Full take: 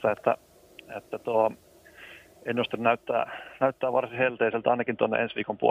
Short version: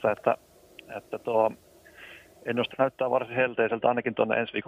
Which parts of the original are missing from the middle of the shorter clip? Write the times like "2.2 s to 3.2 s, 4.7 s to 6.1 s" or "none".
2.7 s to 3.5 s